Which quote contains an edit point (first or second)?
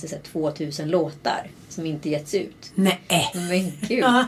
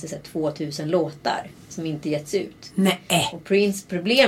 first